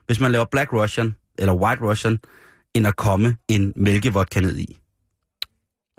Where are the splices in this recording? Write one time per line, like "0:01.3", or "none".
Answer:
0:01.4
0:03.4